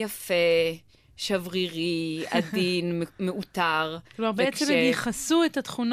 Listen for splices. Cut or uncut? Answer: uncut